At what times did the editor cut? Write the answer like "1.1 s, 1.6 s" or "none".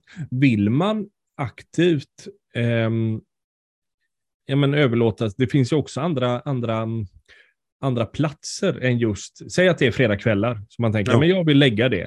none